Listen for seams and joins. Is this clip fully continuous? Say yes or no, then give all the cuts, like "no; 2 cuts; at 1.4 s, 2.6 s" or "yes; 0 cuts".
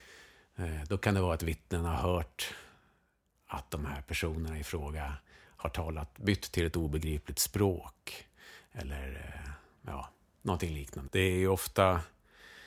no; 1 cut; at 11.1 s